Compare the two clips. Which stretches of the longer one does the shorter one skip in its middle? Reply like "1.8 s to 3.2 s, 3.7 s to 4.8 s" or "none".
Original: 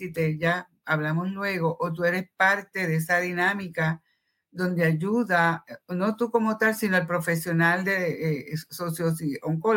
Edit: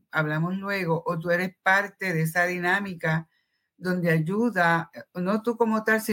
none